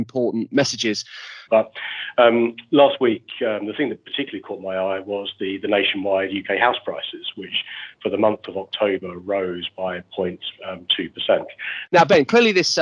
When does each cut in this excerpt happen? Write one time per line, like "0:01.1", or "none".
0:01.5
0:11.9